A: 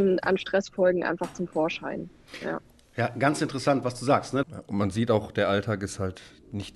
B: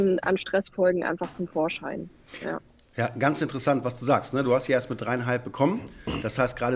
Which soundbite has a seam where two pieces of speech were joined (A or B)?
A